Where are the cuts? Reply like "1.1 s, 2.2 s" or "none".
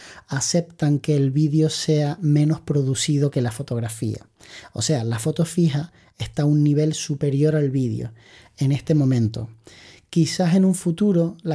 none